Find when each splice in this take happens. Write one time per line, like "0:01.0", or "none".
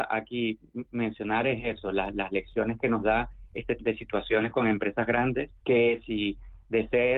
0:03.8
0:05.6